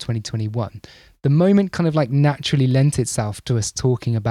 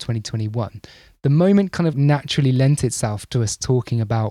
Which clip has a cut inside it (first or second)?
second